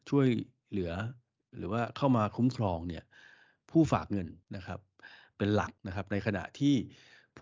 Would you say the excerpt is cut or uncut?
cut